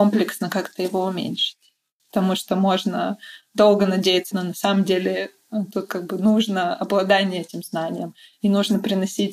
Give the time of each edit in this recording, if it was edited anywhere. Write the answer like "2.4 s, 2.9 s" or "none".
2.0 s, 4.3 s